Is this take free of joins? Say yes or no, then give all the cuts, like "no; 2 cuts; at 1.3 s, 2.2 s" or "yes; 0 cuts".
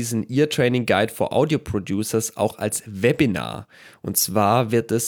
yes; 0 cuts